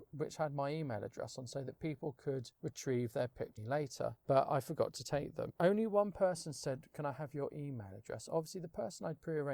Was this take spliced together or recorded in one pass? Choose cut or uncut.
uncut